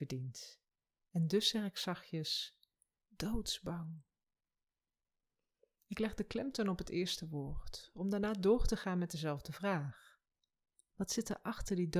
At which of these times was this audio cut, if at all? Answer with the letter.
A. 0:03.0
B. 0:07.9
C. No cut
A